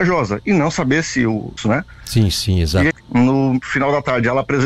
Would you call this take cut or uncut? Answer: cut